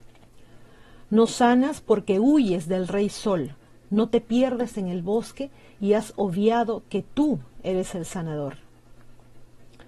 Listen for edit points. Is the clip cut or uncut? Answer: cut